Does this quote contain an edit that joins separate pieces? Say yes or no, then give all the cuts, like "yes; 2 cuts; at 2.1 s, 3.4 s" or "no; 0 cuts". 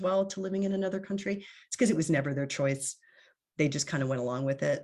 no; 0 cuts